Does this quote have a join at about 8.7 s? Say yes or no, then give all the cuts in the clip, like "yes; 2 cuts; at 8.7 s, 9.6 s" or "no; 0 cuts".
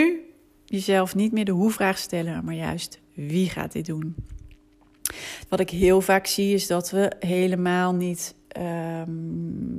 no; 1 cut; at 5.5 s